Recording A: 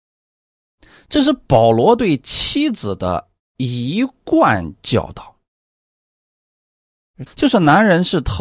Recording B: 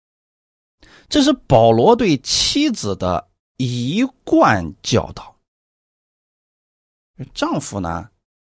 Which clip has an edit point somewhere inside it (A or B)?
A